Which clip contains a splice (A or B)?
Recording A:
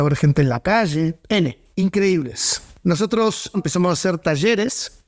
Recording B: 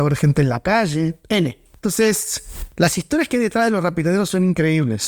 A